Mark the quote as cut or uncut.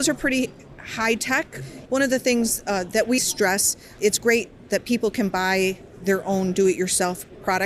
cut